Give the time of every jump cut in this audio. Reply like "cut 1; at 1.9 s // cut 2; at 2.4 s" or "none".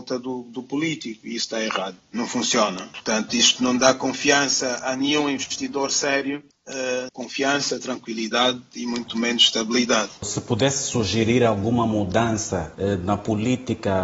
cut 1; at 7.1 s

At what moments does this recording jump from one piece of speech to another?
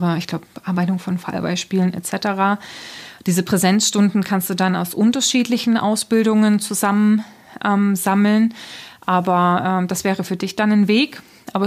none

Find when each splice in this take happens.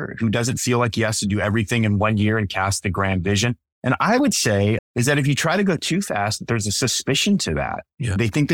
cut 1; at 4.8 s

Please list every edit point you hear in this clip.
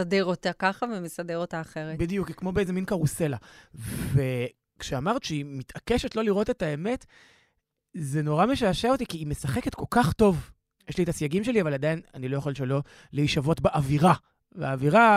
none

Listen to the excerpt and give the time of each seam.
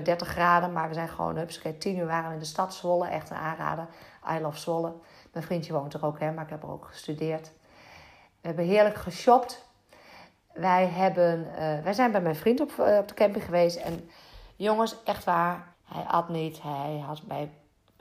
cut 1; at 15.7 s

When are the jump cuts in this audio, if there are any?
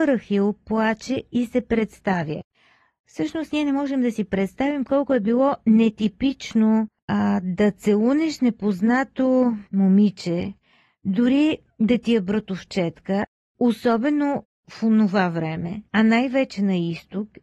cut 1; at 9.7 s // cut 2; at 15.9 s

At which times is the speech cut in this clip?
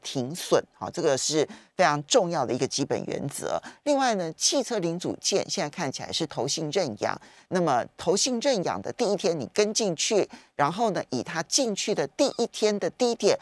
none

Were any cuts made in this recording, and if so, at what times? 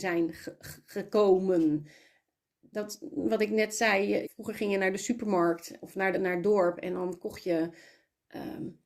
cut 1; at 4.2 s // cut 2; at 6.1 s

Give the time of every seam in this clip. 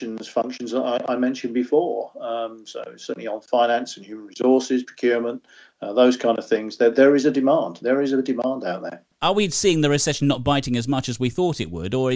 cut 1; at 6.9 s

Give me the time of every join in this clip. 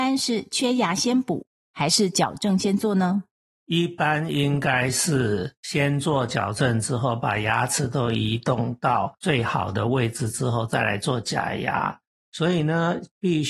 cut 1; at 12.2 s

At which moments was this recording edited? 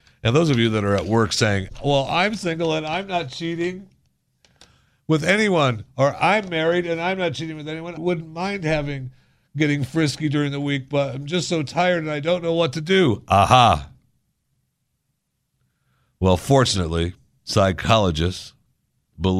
cut 1; at 8.0 s

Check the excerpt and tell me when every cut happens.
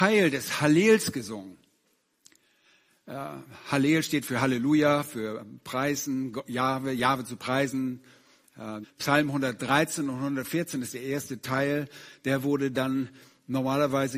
cut 1; at 8.8 s

